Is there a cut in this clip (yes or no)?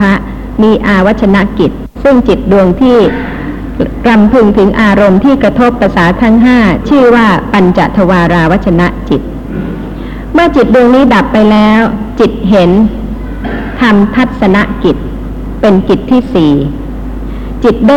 yes